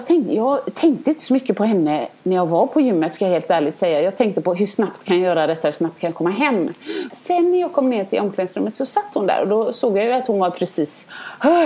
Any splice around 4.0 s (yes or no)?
no